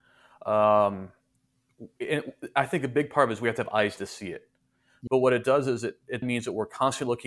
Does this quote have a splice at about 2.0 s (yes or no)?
no